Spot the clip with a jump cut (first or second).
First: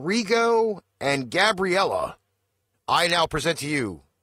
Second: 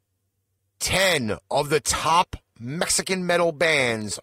first